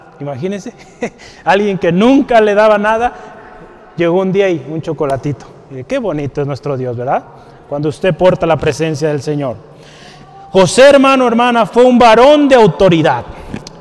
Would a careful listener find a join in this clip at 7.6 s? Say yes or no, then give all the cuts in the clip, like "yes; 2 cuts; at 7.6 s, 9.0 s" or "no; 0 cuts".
no; 1 cut; at 5.8 s